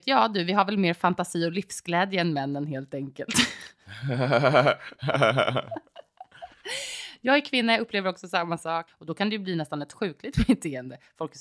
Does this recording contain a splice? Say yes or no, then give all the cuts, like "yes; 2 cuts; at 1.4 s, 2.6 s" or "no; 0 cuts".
yes; 1 cut; at 8.9 s